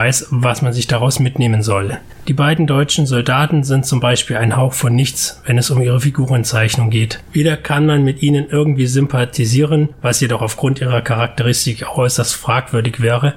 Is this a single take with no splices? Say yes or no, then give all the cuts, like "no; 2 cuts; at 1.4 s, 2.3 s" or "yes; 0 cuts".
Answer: yes; 0 cuts